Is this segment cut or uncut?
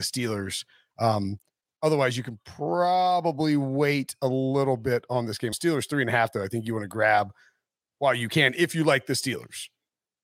cut